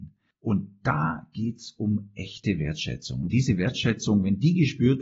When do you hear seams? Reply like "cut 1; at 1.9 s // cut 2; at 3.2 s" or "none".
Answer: none

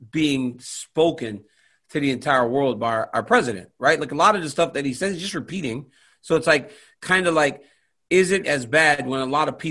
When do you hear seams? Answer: cut 1; at 8.4 s

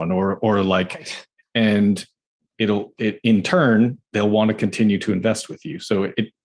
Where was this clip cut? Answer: cut 1; at 1.4 s

